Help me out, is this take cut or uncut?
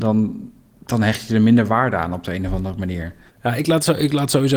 cut